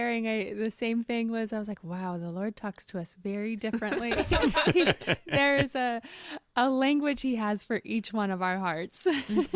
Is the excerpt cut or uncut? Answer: uncut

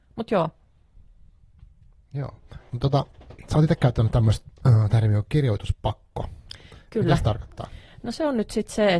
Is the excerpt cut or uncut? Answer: uncut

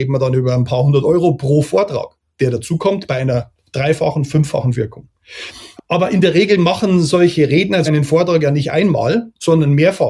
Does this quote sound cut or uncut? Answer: cut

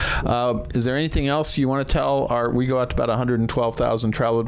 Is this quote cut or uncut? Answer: uncut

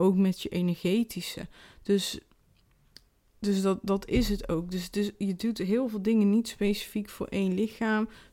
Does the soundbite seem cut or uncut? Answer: uncut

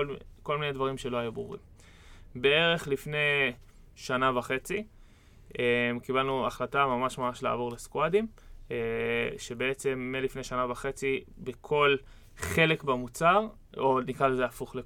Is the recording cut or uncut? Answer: uncut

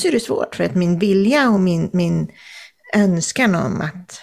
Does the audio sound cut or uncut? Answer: uncut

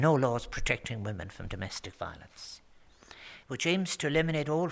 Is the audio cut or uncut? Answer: cut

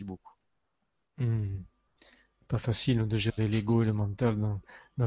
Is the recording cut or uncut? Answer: uncut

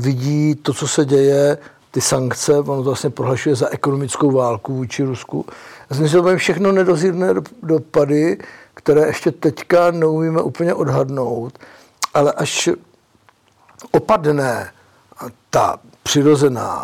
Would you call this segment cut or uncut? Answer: uncut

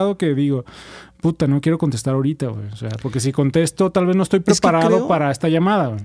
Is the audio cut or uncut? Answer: uncut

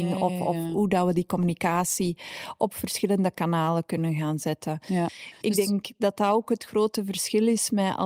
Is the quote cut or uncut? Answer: uncut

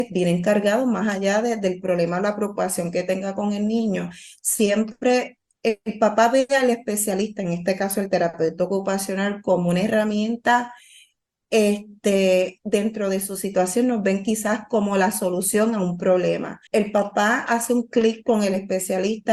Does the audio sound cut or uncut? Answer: cut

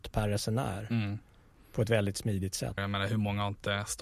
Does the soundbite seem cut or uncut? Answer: cut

